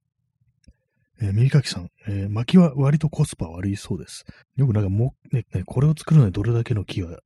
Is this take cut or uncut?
cut